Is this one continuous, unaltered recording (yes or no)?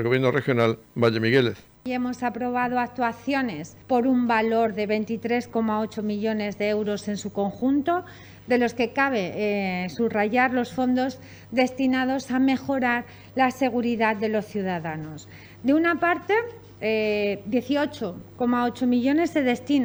no